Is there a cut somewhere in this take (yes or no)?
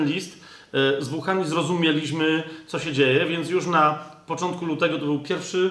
no